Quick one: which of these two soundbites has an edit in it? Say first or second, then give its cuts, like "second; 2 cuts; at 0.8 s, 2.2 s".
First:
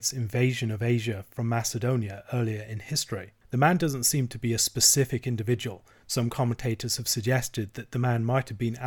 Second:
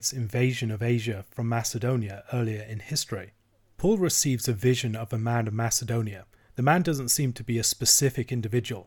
first; 1 cut; at 3.4 s